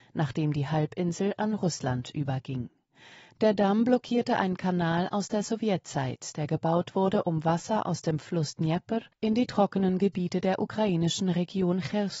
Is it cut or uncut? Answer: uncut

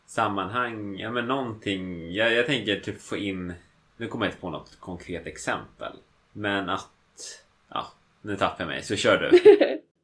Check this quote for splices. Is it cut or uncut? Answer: uncut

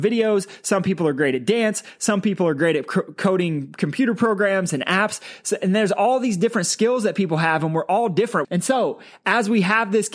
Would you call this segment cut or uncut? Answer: cut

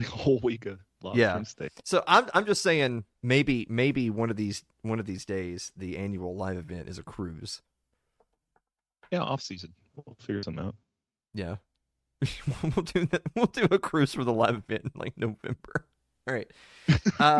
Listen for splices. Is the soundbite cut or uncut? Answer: uncut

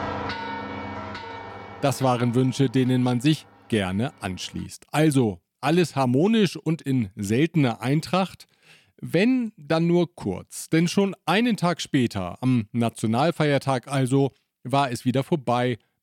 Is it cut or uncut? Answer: uncut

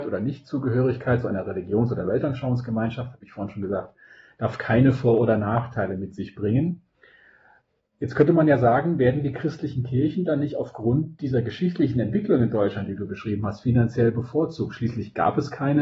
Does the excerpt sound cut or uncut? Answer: uncut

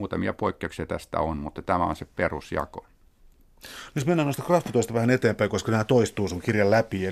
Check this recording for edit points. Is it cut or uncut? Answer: uncut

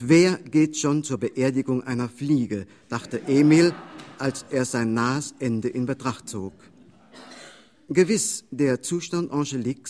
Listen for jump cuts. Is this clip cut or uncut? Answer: uncut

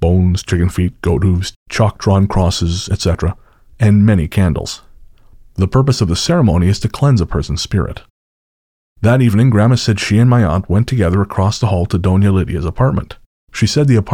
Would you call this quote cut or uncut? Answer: uncut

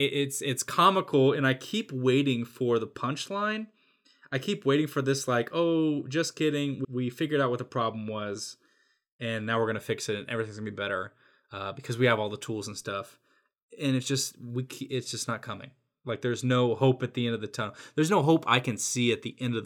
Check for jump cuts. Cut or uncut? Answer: cut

